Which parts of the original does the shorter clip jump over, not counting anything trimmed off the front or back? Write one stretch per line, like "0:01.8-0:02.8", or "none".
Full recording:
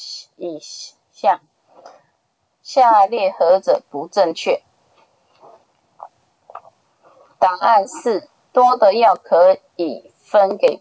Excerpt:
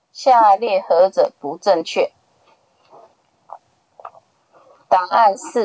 none

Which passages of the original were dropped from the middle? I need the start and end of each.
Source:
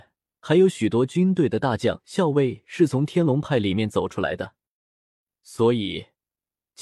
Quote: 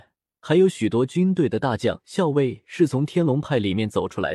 none

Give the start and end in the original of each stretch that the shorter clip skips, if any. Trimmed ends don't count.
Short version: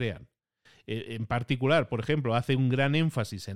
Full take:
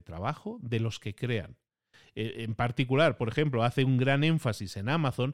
none

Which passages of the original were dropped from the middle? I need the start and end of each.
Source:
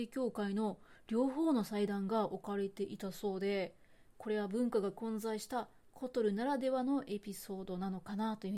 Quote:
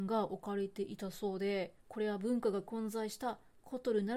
0:03.8-0:04.1

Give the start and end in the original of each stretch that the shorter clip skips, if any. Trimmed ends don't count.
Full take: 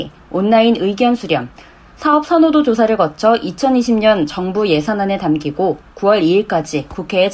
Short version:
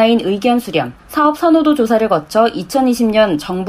0:01.5-0:01.9

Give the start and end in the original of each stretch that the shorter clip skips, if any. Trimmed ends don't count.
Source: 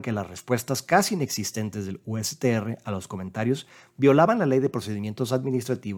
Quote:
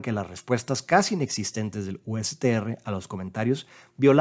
none

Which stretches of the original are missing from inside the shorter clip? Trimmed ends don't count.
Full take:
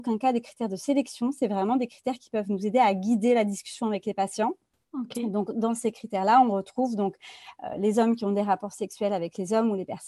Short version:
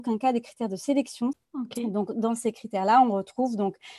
0:01.3-0:04.7

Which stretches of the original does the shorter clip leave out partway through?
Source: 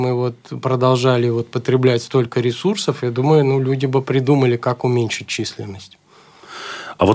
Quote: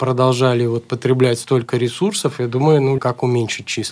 0:03.6-0:04.6

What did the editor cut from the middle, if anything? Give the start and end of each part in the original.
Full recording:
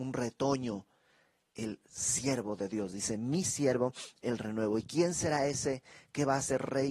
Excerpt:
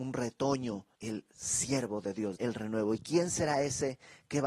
0:00.9-0:01.5
0:02.9-0:04.2

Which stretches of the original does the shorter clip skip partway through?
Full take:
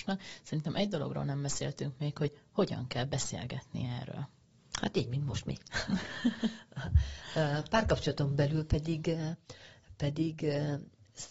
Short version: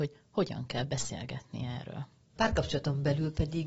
0:04.6-0:07.7

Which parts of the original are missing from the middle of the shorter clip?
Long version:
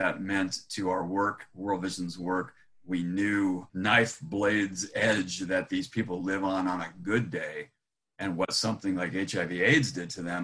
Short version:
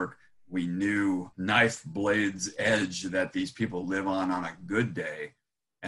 none

